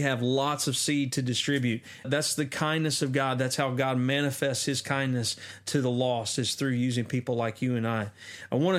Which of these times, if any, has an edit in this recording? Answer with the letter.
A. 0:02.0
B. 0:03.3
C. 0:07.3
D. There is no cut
A